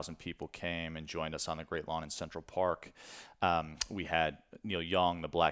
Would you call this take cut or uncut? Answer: uncut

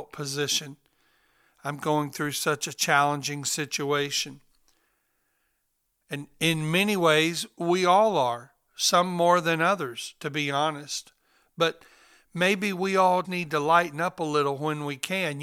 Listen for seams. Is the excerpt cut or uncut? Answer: cut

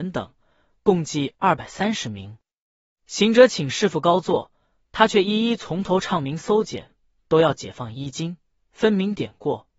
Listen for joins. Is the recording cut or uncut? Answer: uncut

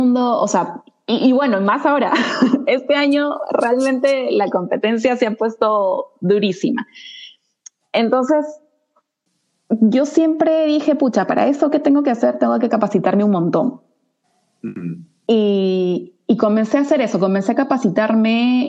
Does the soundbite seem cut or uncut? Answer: uncut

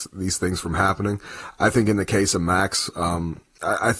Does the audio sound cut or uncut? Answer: uncut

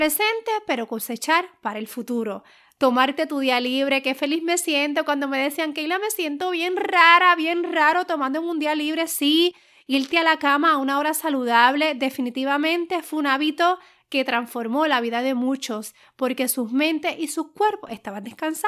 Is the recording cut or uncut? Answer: uncut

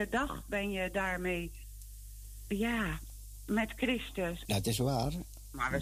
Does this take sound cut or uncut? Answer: cut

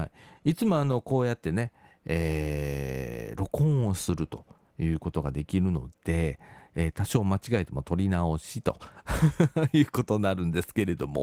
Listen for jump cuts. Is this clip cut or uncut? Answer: uncut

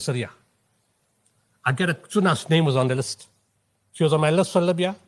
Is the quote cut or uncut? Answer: uncut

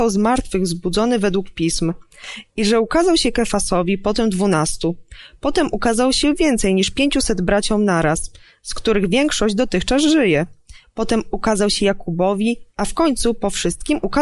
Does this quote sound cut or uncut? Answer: cut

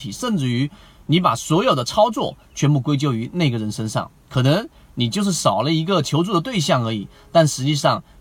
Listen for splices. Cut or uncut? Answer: uncut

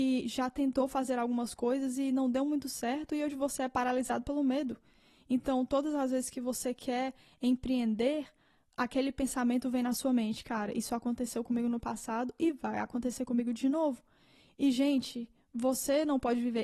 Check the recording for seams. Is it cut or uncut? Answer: uncut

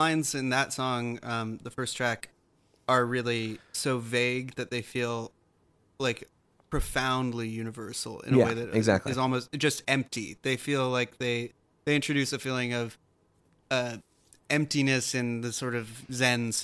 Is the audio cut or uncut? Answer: uncut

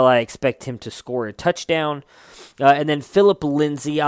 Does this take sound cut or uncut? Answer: uncut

